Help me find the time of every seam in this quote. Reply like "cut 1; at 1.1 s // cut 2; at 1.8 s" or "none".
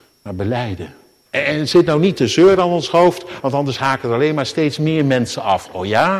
cut 1; at 1.3 s // cut 2; at 3.4 s